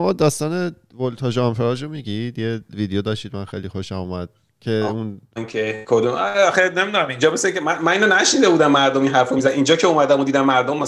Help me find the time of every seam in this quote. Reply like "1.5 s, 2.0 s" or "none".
none